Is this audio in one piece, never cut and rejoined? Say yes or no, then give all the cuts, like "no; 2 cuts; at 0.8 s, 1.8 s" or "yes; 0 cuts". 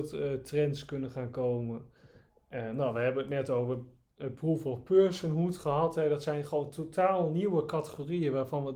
yes; 0 cuts